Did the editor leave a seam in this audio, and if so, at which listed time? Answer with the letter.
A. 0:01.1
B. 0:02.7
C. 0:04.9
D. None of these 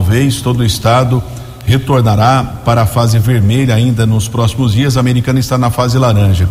D